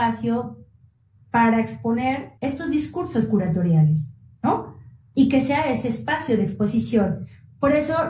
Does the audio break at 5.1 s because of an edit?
no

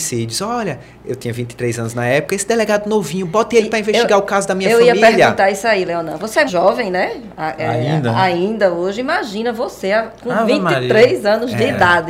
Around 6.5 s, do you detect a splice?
yes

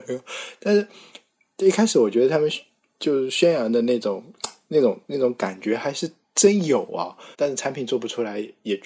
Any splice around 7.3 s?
yes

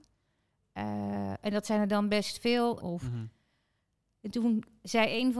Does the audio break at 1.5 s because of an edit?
no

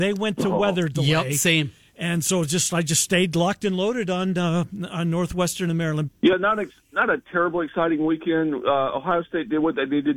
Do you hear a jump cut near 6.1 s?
yes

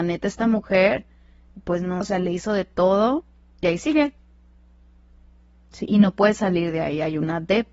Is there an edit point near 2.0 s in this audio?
yes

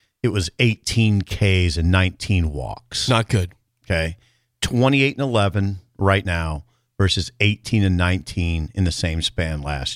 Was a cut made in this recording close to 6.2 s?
no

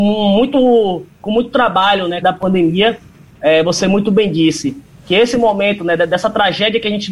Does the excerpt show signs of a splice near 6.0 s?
no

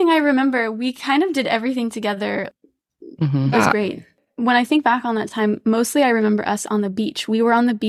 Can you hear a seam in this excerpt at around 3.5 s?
yes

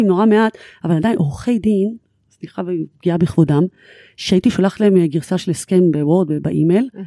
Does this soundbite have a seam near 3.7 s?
no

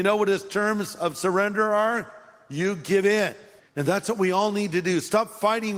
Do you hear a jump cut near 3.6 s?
yes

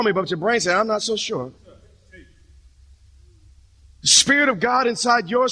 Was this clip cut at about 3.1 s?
no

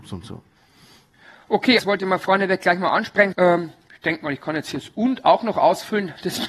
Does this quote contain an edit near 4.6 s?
no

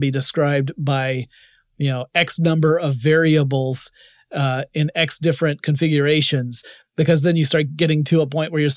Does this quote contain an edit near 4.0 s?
no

